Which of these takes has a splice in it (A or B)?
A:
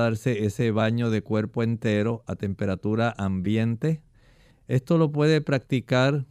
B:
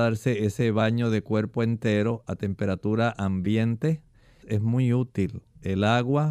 B